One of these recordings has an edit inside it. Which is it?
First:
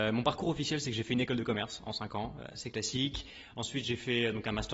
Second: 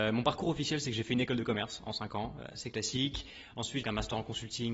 second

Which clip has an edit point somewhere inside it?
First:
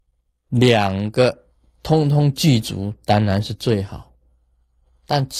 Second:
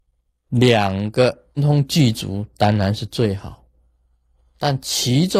second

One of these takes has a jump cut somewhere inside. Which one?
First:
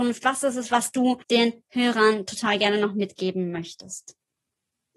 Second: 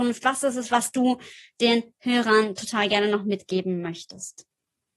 first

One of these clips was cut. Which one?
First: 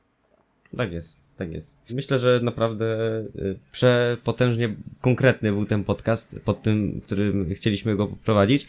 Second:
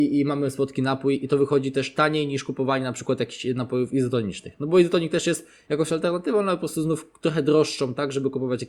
first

